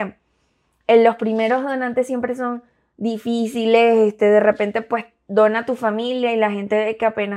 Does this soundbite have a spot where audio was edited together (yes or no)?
no